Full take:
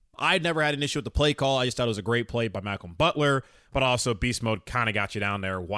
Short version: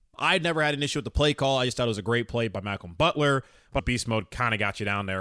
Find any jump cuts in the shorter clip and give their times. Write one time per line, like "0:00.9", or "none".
0:03.8